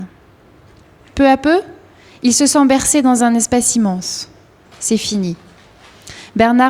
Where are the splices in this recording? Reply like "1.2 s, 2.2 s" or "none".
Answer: 4.6 s